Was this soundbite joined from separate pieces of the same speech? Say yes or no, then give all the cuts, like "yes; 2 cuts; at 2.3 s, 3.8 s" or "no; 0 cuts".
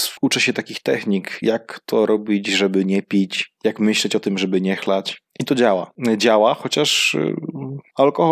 no; 0 cuts